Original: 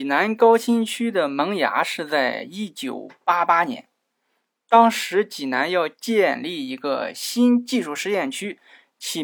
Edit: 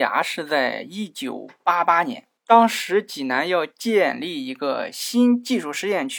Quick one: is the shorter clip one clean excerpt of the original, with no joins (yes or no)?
no